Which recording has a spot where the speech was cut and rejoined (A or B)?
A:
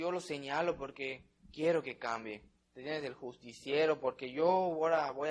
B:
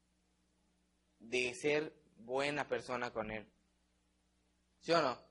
A